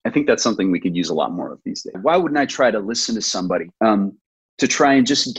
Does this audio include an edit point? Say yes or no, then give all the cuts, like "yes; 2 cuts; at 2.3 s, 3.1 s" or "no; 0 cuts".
yes; 2 cuts; at 1.9 s, 3.8 s